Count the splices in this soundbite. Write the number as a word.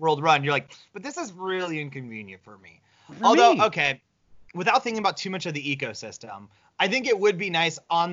zero